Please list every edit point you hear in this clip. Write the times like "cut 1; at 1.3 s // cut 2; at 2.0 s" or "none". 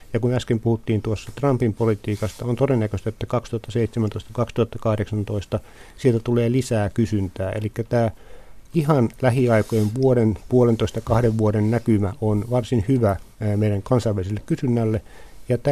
none